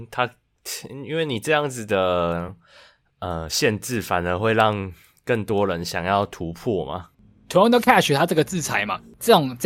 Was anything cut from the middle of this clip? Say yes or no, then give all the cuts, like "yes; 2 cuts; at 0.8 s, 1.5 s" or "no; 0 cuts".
no; 0 cuts